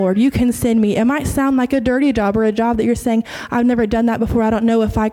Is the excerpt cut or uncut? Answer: uncut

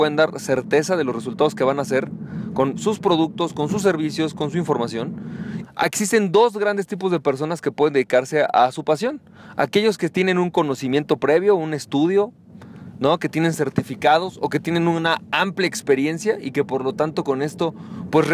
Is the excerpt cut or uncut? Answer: cut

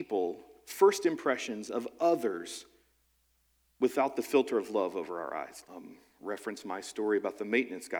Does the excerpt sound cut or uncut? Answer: cut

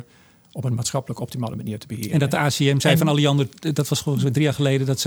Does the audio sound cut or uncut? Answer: uncut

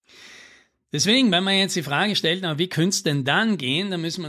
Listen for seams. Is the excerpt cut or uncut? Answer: uncut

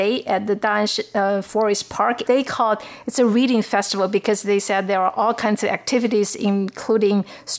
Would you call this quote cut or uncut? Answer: cut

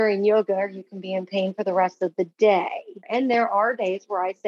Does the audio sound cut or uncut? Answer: cut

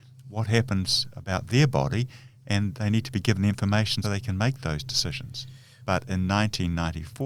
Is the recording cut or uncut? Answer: cut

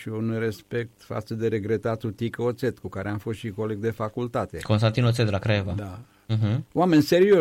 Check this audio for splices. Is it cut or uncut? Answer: uncut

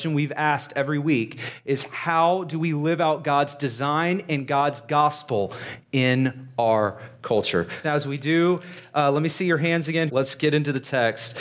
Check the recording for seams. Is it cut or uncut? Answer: cut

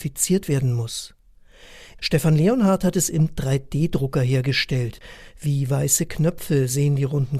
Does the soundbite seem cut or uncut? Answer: cut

